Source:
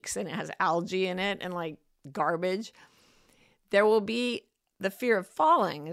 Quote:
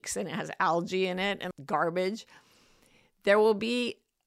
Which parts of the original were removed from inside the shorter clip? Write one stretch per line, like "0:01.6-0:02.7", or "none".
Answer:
0:01.5-0:02.0